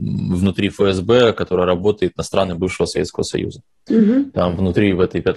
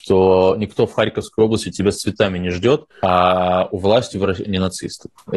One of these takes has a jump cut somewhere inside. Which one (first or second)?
second